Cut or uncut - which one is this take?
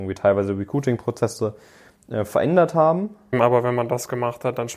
cut